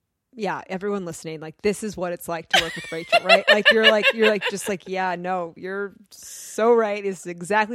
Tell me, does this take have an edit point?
no; 0 cuts

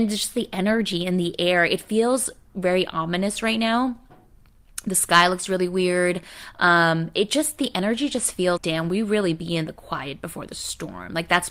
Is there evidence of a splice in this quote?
yes; 1 cut; at 8.6 s

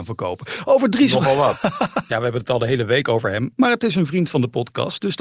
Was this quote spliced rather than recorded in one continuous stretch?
yes; 1 cut; at 2.1 s

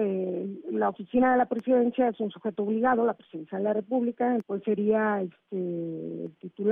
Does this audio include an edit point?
yes; 1 cut; at 4.4 s

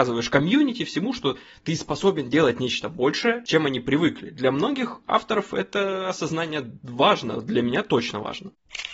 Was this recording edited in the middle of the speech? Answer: no; 0 cuts

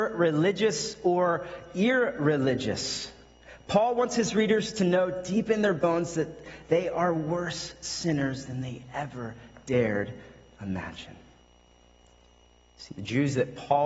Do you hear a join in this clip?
no; 0 cuts

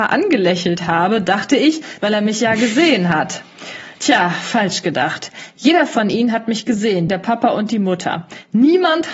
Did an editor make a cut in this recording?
yes; 2 cuts; at 2.0 s, 7.1 s

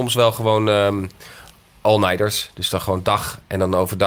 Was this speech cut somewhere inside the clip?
no; 0 cuts

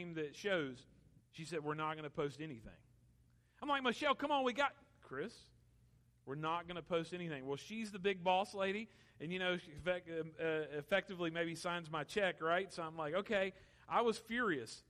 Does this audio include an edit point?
yes; 1 cut; at 1.2 s

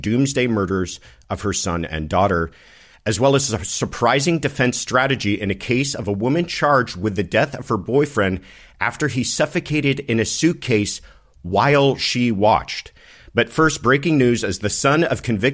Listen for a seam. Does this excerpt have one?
no; 0 cuts

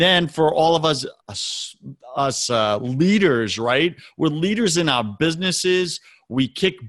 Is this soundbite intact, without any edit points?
no; 1 cut; at 1.2 s

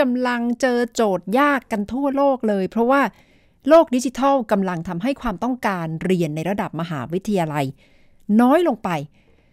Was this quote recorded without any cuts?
yes; 0 cuts

